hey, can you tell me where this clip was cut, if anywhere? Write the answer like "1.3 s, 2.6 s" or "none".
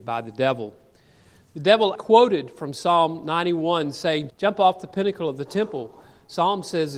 1.9 s, 4.3 s